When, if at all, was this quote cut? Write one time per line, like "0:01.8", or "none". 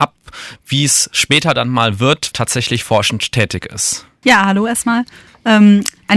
0:02.3
0:04.2